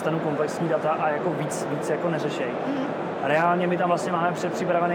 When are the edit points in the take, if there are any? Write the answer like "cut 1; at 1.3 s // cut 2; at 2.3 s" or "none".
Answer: none